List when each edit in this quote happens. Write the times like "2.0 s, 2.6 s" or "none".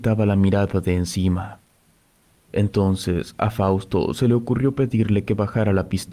none